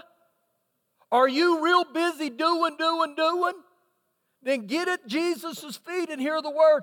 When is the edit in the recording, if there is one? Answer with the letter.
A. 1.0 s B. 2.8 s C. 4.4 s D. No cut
B